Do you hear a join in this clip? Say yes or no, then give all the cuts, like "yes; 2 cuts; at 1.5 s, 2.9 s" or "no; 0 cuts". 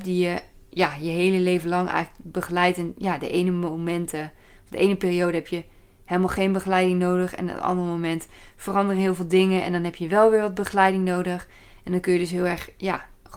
no; 0 cuts